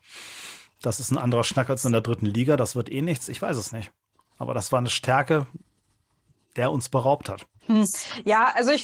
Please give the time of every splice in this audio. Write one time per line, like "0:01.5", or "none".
0:07.6